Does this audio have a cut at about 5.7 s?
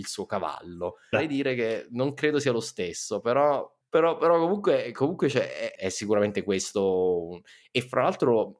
yes; 2 cuts; at 1.1 s, 5.7 s

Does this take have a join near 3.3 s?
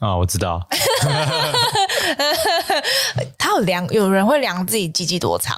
yes; 1 cut; at 3.3 s

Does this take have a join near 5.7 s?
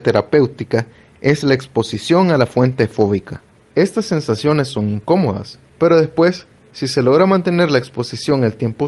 yes; 2 cuts; at 3.7 s, 5.7 s

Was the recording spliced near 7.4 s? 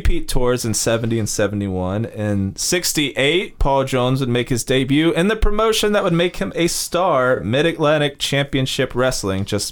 no; 0 cuts

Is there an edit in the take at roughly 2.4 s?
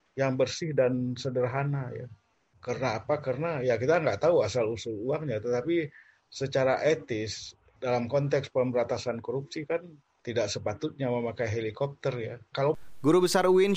no; 1 cut; at 12.5 s

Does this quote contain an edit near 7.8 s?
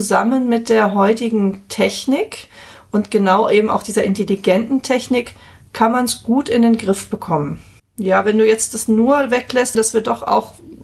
yes; 2 cuts; at 7.8 s, 9.8 s

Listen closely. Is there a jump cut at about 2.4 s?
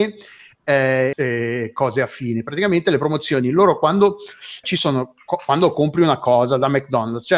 no; 2 cuts; at 1.1 s, 4.6 s

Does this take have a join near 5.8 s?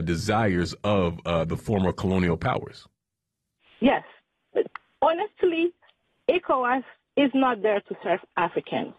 no; 0 cuts

